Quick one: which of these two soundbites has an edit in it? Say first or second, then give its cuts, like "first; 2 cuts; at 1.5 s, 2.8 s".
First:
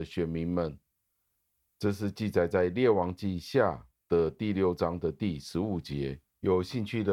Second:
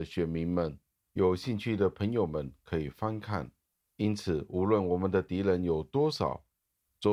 second; 1 cut; at 1.0 s